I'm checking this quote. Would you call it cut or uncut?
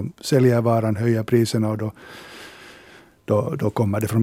uncut